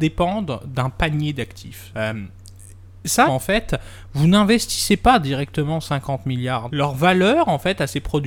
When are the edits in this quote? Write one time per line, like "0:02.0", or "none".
0:01.9
0:03.3
0:06.7